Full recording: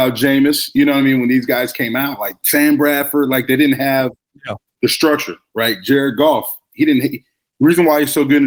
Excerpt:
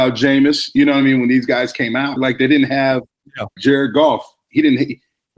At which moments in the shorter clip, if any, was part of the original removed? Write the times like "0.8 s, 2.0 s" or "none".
2.2 s, 3.6 s